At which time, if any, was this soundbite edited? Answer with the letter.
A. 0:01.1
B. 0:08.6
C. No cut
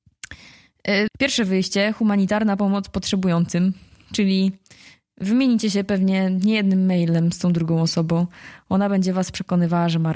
A